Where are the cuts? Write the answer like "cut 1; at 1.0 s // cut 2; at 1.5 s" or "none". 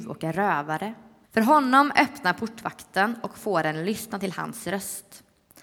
cut 1; at 1.2 s